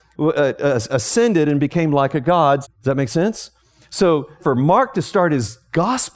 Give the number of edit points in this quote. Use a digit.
2